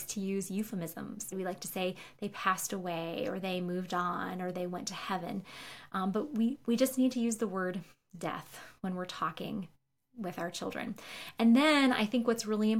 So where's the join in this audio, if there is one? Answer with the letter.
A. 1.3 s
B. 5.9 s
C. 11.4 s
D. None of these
A